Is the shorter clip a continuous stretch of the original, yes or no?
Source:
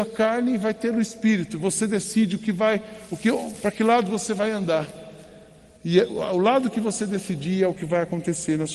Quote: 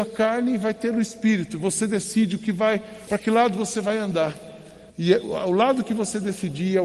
no